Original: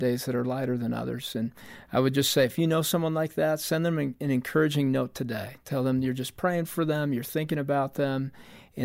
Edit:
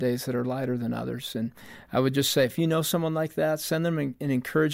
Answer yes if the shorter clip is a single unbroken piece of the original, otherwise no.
yes